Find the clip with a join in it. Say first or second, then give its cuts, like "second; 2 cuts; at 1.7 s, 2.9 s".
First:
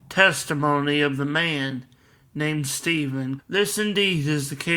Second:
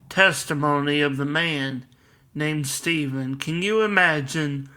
first; 1 cut; at 3.4 s